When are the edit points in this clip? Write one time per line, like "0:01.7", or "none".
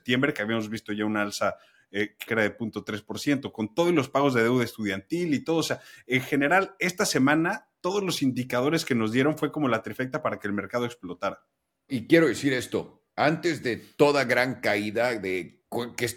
0:02.3
0:11.9